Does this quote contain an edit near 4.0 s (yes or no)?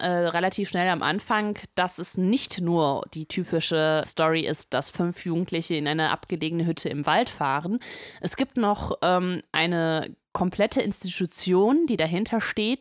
yes